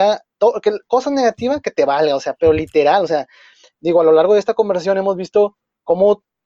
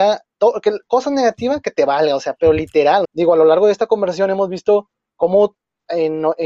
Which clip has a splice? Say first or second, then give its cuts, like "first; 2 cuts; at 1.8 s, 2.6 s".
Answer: second; 1 cut; at 3.0 s